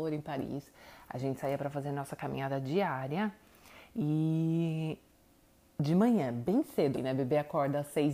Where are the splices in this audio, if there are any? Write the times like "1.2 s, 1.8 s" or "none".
6.9 s